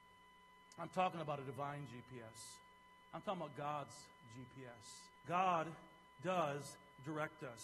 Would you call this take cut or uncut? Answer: cut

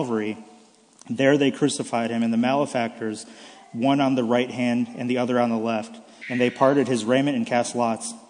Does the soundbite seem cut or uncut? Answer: cut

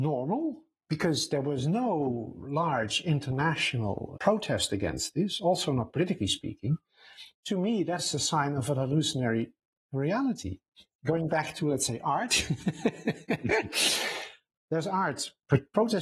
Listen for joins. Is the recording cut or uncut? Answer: cut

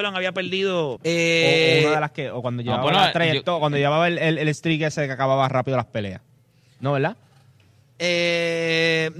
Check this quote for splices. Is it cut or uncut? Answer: cut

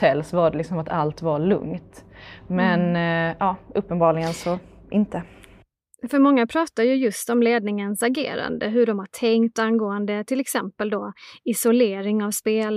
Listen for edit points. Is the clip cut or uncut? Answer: uncut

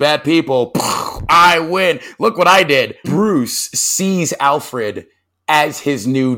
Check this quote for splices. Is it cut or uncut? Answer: cut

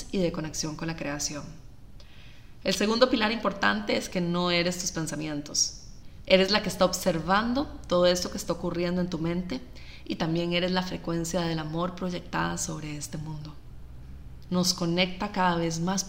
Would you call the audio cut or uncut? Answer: cut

